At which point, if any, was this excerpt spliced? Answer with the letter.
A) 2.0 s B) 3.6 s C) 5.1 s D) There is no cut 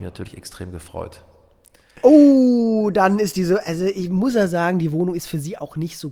A